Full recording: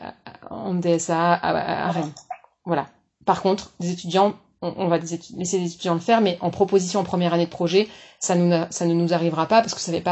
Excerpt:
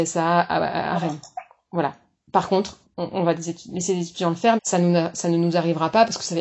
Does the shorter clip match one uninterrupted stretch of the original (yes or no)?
no